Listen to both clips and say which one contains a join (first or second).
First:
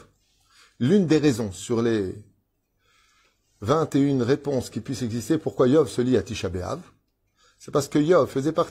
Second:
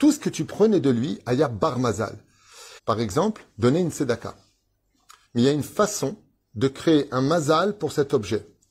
second